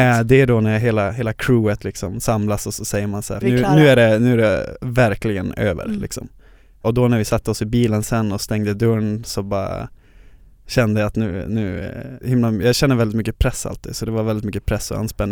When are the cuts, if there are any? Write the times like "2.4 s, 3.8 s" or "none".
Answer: 3.4 s, 12.2 s